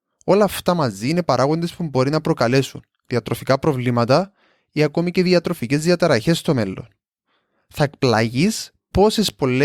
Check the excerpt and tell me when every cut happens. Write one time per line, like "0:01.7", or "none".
none

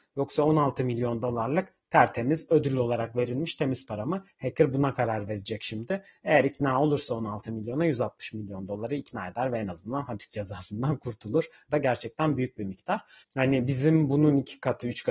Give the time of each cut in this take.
0:11.7
0:13.2

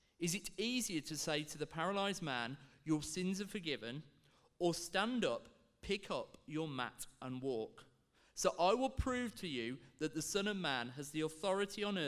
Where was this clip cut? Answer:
none

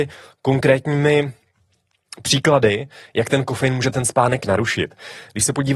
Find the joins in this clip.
none

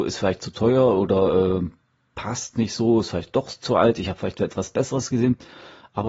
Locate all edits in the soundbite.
none

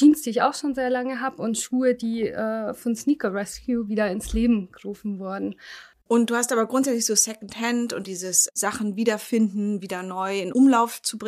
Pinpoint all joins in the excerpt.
0:05.9
0:08.0

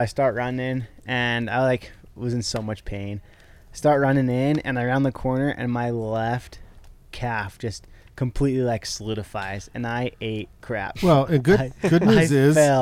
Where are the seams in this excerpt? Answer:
none

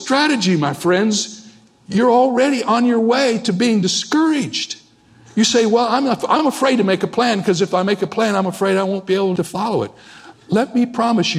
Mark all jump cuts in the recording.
none

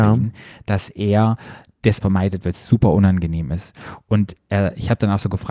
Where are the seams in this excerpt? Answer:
0:02.0

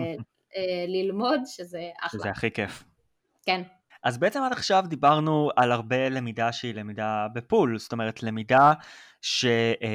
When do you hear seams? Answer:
0:03.9

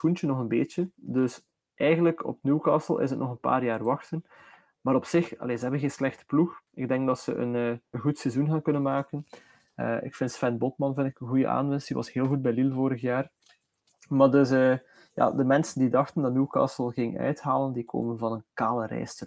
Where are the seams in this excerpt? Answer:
0:07.9

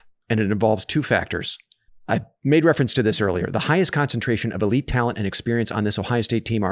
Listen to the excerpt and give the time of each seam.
0:01.9

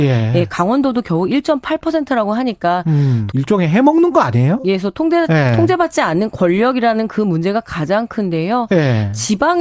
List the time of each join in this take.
0:03.3

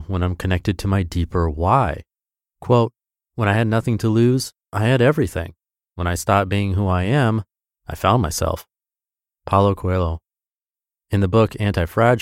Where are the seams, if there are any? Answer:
0:02.5

